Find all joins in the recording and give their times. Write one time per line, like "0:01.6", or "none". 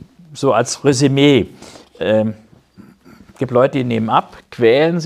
none